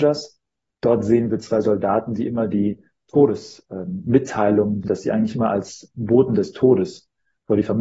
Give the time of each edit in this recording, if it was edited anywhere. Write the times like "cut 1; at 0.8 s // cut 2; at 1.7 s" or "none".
cut 1; at 4.8 s